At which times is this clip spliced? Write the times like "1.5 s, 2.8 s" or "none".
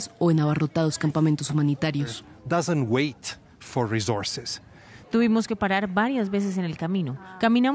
5.0 s